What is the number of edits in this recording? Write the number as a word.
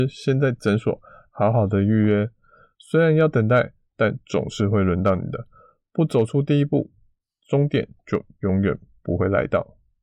zero